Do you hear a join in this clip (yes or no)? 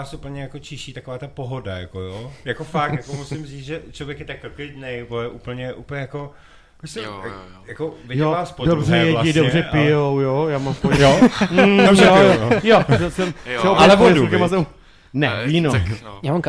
no